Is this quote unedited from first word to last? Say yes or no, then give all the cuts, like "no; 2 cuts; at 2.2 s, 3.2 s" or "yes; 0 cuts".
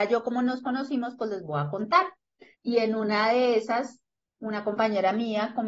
no; 1 cut; at 2.5 s